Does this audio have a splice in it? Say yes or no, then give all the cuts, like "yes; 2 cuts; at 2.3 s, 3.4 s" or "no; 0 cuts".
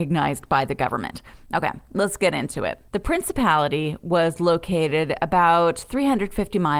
no; 0 cuts